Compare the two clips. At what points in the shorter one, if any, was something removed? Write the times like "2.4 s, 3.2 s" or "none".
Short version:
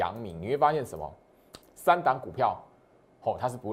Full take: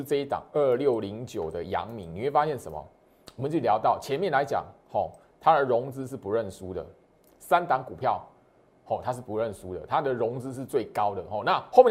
1.6 s